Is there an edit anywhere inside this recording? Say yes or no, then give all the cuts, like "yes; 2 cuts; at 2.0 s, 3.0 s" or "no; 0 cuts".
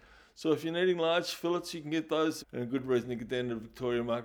yes; 1 cut; at 2.4 s